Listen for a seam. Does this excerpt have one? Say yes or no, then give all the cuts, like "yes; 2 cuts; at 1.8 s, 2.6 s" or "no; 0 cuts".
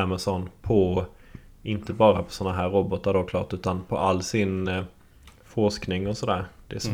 no; 0 cuts